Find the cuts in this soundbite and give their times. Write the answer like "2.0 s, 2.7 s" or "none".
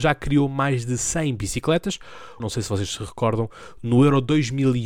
2.4 s